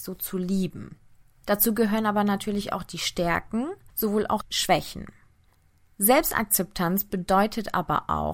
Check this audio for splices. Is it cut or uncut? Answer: uncut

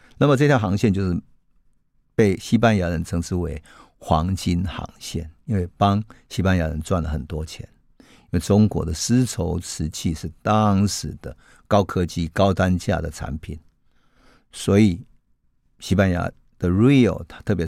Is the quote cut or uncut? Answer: uncut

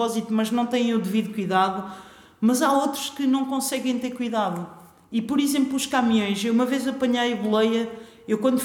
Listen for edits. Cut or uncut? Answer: uncut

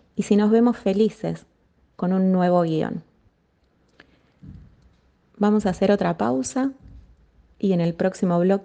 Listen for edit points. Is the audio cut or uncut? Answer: uncut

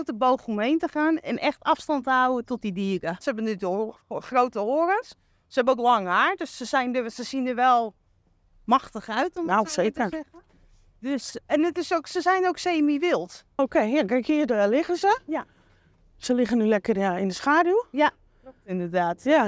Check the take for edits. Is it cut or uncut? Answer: cut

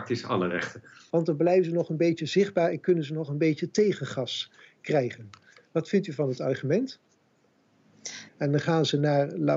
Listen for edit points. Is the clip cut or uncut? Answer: cut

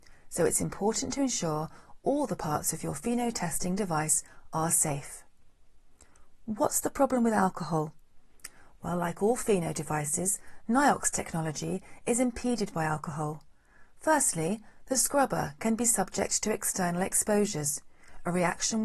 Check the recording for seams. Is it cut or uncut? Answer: uncut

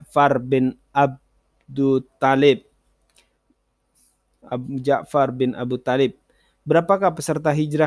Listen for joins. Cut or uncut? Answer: uncut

